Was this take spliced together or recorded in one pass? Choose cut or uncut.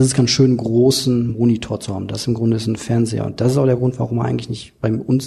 uncut